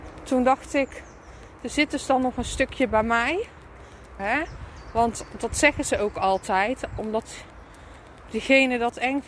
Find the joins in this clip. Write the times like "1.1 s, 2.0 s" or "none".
4.2 s, 7.0 s